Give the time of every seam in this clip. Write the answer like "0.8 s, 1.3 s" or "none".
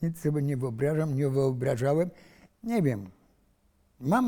2.5 s